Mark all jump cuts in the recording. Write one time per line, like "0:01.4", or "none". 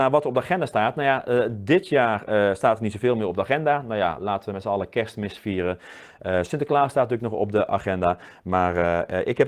none

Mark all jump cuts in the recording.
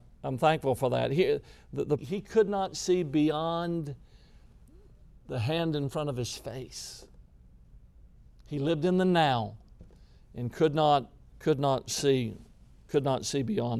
0:02.0

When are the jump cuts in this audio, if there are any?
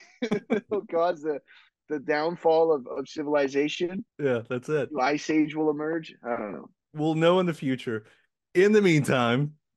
0:04.1

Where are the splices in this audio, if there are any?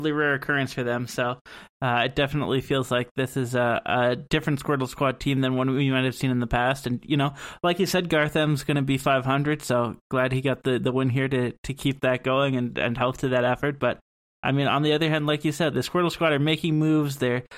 0:15.7

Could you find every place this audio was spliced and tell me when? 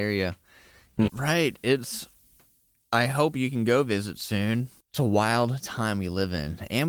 0:01.1
0:04.8

